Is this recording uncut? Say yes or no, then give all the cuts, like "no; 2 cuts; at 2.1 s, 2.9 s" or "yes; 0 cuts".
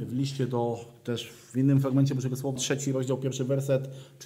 no; 1 cut; at 2.6 s